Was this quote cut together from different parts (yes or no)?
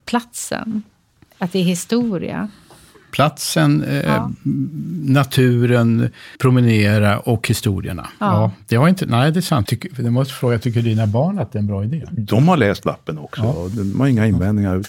yes